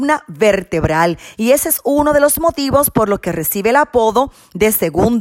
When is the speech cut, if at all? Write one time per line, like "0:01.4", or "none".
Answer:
none